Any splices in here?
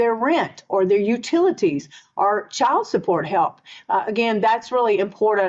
no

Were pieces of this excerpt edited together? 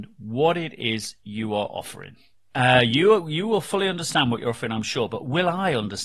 yes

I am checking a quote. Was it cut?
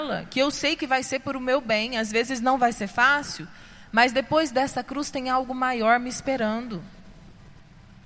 no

